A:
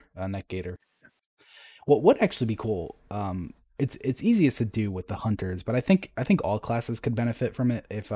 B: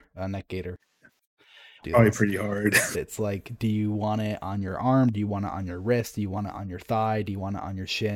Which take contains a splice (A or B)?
B